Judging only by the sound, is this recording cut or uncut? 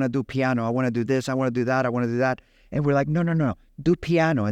uncut